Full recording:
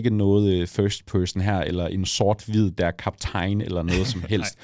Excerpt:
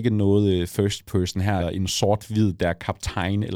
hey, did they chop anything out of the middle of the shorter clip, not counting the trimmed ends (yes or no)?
yes